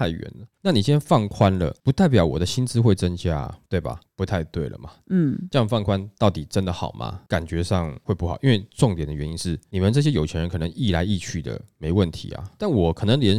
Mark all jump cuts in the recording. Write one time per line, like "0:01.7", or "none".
0:04.0